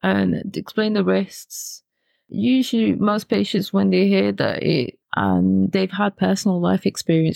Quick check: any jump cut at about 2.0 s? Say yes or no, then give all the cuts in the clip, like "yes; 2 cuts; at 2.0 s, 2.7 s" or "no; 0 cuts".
no; 1 cut; at 5.0 s